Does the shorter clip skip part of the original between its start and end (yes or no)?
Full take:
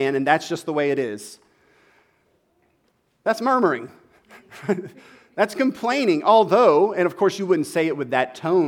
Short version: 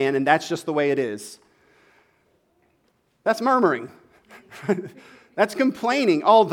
no